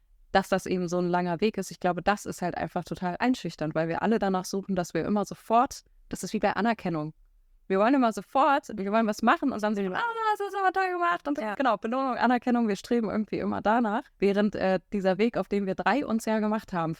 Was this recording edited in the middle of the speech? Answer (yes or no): yes